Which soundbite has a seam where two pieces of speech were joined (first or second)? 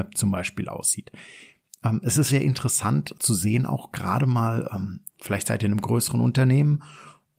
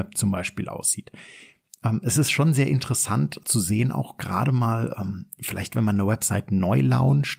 first